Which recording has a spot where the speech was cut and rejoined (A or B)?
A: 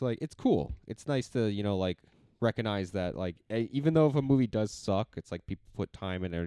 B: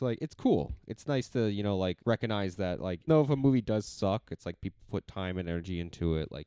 B